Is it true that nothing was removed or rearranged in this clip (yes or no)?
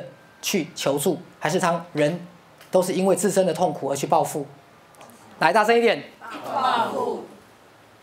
no